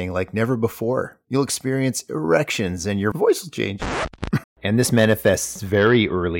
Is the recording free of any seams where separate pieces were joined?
no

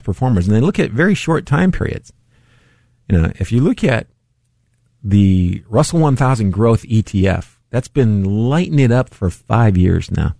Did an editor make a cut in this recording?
yes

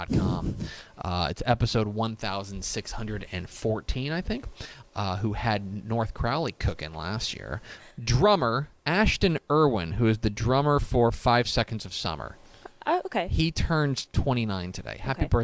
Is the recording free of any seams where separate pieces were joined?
no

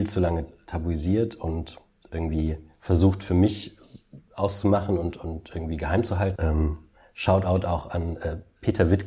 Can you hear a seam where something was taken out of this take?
yes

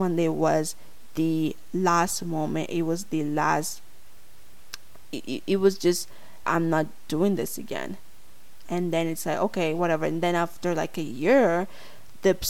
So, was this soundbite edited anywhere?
yes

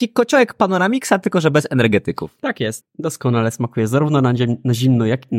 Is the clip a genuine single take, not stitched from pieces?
no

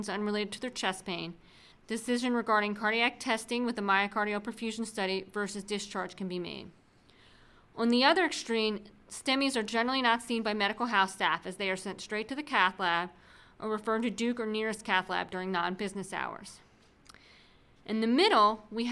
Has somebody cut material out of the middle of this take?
yes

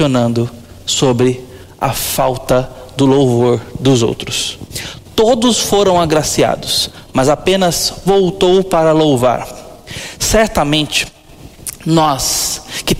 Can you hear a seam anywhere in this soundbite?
yes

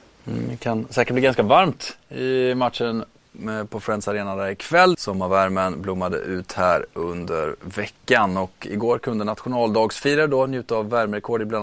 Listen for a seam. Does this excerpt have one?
yes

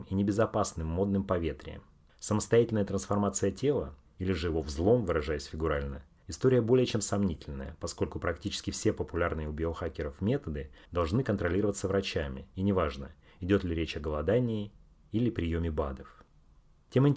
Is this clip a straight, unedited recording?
yes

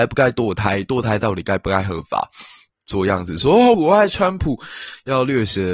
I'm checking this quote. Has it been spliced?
yes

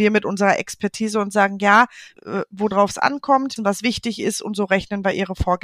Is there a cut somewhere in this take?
yes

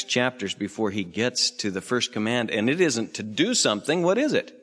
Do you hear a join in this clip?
no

